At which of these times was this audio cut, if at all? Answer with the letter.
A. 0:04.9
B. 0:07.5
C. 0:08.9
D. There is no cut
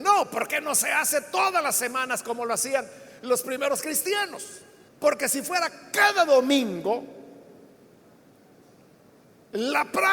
A